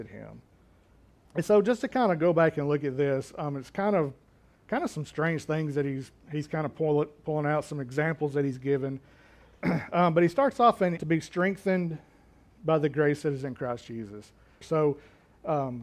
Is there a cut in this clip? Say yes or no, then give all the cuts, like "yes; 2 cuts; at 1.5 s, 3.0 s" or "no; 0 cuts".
yes; 3 cuts; at 1.3 s, 11.0 s, 14.6 s